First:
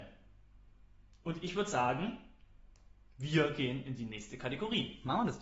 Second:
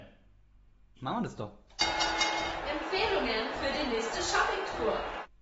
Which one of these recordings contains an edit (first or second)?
second